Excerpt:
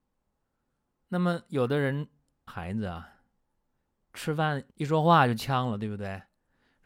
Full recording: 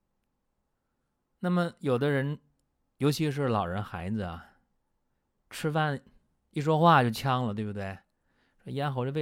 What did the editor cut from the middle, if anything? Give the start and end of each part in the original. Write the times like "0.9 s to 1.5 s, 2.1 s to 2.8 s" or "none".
2.8 s to 3.8 s, 6.1 s to 6.5 s